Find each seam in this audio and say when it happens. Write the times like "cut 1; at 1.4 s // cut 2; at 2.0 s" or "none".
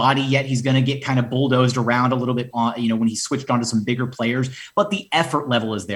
cut 1; at 2.5 s